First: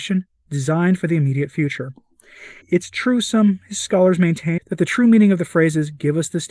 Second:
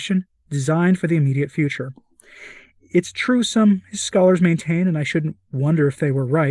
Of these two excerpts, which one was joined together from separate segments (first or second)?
first